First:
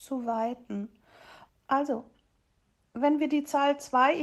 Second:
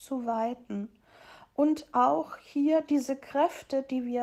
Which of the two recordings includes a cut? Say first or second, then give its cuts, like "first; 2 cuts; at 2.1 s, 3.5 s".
first; 1 cut; at 1.5 s